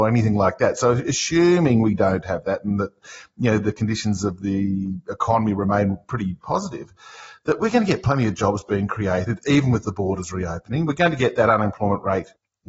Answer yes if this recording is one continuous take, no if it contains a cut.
no